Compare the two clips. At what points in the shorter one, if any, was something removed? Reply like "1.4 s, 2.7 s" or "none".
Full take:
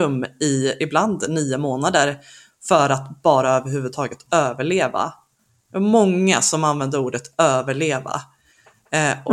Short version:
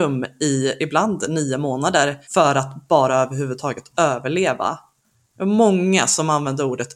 2.2 s